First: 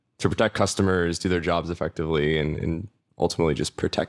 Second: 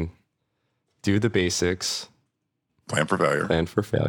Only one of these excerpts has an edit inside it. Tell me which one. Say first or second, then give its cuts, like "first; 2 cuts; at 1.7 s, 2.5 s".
second; 1 cut; at 2.7 s